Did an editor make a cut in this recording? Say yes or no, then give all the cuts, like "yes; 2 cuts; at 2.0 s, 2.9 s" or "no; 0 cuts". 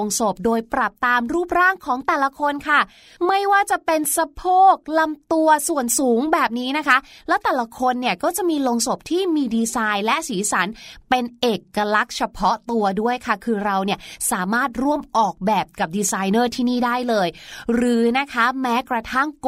no; 0 cuts